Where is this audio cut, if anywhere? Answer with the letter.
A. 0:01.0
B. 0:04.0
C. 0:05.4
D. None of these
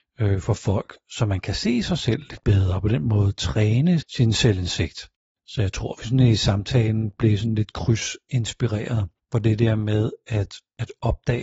B